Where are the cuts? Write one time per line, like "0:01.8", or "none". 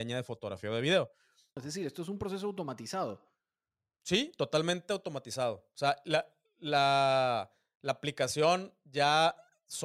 0:01.6